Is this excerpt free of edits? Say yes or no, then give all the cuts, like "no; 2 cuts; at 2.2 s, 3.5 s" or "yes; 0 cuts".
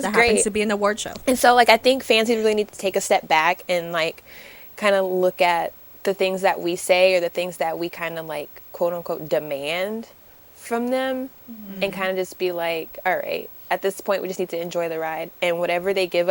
yes; 0 cuts